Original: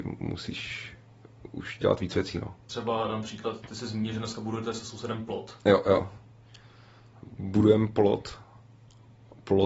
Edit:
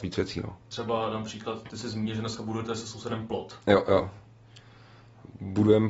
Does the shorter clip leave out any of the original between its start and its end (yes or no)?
no